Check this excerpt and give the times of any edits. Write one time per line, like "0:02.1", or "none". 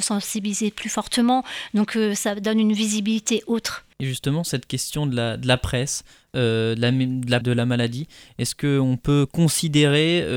0:03.9
0:07.4